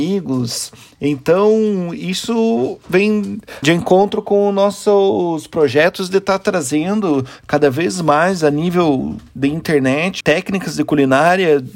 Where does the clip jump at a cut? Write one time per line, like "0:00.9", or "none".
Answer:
0:03.6
0:10.2